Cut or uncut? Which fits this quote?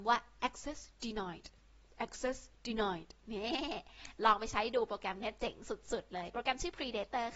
uncut